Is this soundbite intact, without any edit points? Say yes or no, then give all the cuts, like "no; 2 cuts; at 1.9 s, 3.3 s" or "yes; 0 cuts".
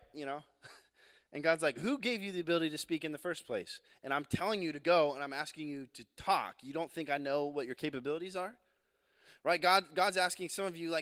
yes; 0 cuts